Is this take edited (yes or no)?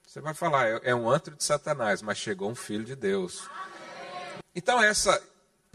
yes